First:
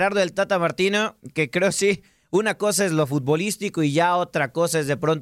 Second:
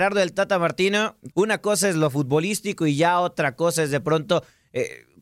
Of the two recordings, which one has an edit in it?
second; 1 cut; at 1.3 s

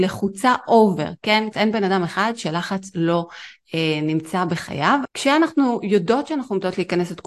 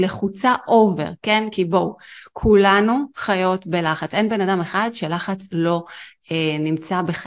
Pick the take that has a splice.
first; 2 cuts; at 1.5 s, 5.0 s

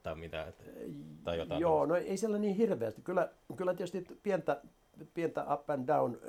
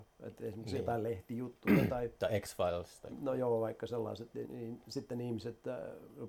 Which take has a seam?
second; 1 cut; at 4.4 s

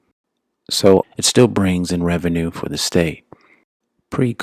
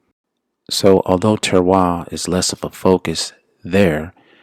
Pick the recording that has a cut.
first; 1 cut; at 1.0 s

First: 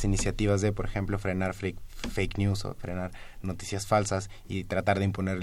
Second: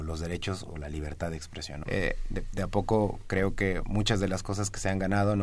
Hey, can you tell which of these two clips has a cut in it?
second; 1 cut; at 1.8 s

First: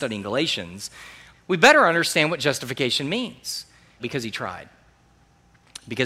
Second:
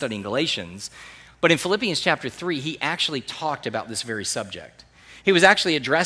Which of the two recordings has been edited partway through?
first; 2 cuts; at 1.3 s, 4.0 s

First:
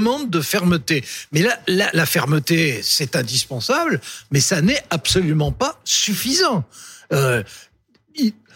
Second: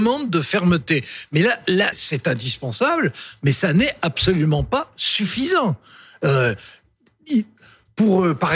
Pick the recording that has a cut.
second; 1 cut; at 1.9 s

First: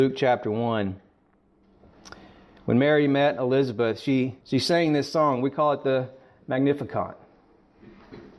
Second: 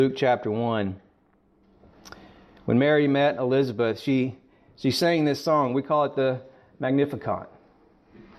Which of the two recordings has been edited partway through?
first; 1 cut; at 4.4 s

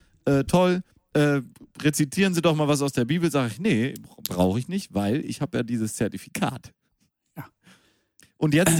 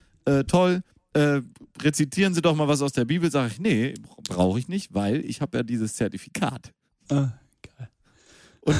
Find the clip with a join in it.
second; 1 cut; at 7.0 s

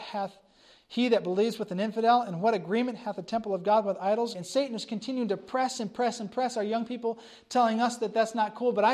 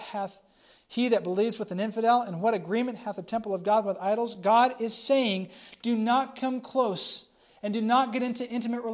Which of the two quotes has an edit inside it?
first; 1 cut; at 4.3 s

